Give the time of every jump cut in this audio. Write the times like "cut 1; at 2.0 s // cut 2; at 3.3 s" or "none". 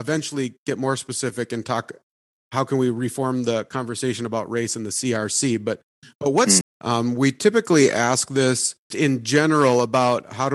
cut 1; at 6.6 s // cut 2; at 8.9 s